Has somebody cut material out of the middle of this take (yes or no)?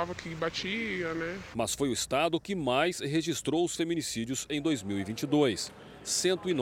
yes